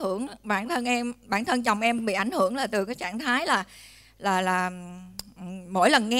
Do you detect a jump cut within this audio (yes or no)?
no